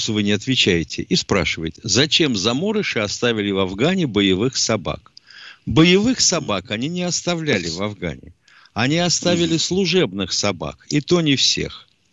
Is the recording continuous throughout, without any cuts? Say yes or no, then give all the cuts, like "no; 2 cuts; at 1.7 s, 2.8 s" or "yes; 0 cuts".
yes; 0 cuts